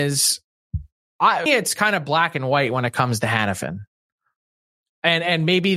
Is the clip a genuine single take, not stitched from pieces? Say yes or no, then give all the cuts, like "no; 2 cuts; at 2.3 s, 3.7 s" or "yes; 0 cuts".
no; 1 cut; at 1.5 s